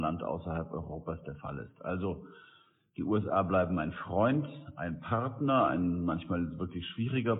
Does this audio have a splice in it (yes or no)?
no